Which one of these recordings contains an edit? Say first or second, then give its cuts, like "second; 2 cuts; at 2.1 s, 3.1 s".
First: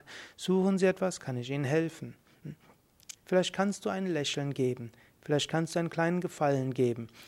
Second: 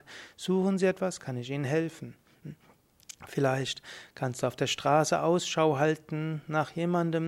first; 1 cut; at 3.2 s